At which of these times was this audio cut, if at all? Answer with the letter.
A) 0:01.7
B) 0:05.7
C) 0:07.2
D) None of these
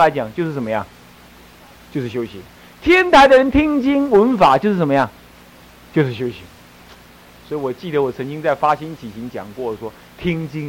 A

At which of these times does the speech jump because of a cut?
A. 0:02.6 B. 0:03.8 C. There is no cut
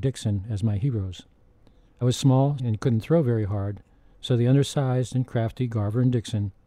A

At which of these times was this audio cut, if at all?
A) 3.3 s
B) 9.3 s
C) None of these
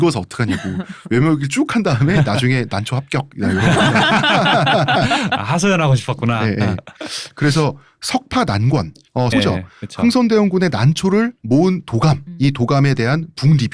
B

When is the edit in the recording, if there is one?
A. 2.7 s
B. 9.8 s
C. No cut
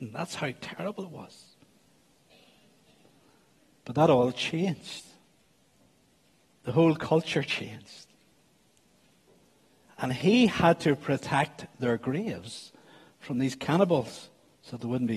B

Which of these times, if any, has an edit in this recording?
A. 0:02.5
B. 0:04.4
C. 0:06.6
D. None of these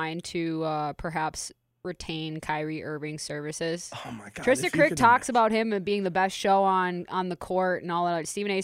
D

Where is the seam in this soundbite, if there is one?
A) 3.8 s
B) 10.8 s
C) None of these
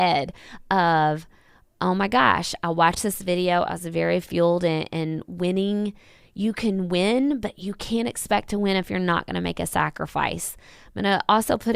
C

